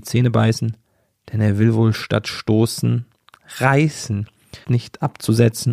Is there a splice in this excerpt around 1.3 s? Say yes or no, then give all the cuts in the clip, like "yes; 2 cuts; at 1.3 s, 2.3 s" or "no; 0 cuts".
no; 1 cut; at 4.6 s